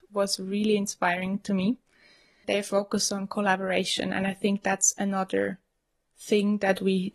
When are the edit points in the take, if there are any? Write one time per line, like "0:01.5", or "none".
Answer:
none

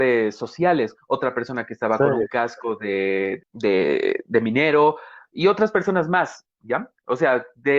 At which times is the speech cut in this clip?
0:01.0
0:03.4

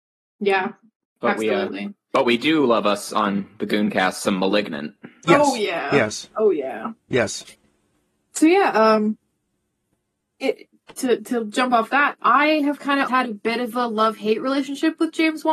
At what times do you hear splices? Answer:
0:10.9
0:13.1

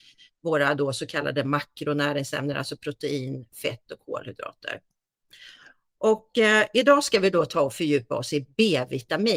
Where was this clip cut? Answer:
none

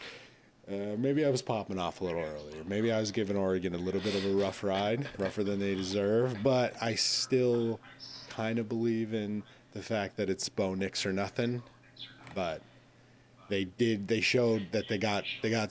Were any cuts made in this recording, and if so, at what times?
none

